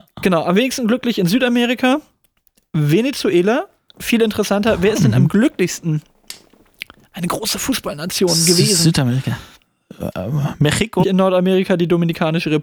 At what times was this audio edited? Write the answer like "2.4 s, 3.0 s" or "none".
11.0 s